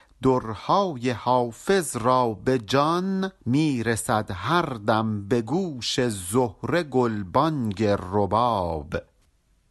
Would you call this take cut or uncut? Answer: cut